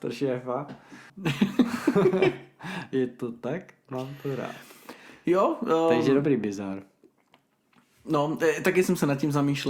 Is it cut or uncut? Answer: cut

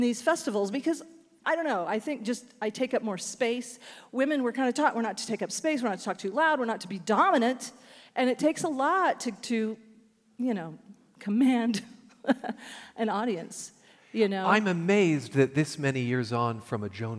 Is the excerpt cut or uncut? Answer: uncut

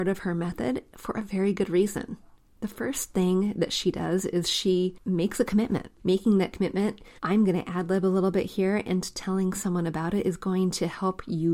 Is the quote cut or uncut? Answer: cut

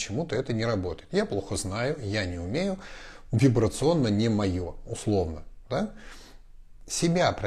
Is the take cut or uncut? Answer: uncut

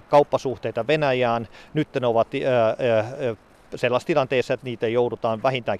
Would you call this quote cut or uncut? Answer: uncut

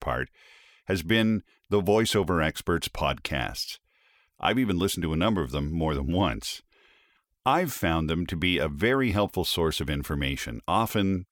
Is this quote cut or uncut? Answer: uncut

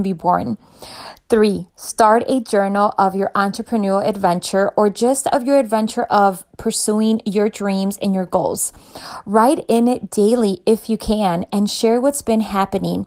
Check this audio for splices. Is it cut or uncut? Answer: uncut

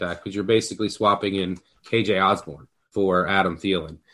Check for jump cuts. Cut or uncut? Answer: cut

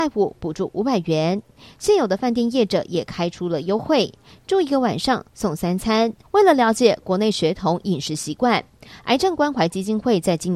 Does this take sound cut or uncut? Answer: cut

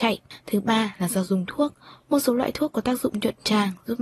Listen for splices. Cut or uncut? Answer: uncut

